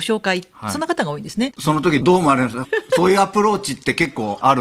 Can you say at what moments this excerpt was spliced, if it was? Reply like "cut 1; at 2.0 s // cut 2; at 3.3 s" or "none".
cut 1; at 1.5 s